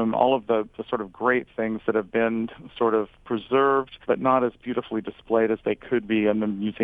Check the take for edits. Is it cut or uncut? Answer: cut